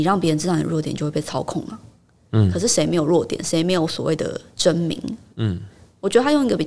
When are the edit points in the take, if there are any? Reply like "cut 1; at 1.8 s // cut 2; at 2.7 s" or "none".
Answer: none